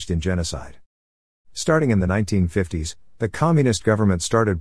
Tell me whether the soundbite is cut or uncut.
cut